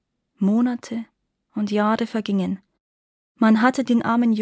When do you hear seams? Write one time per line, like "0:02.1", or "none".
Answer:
none